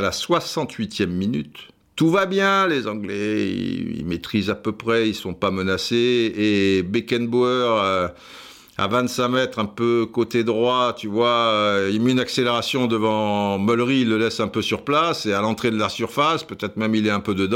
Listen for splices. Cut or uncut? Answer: uncut